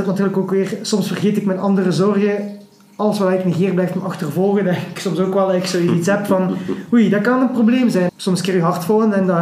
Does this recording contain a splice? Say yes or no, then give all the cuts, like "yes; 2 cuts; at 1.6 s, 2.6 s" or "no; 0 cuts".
yes; 1 cut; at 8.1 s